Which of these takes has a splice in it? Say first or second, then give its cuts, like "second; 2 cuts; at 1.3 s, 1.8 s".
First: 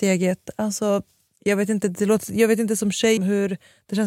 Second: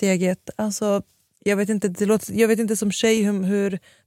first; 1 cut; at 3.2 s